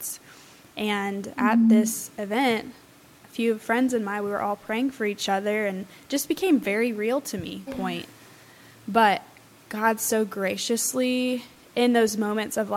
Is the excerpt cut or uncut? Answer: cut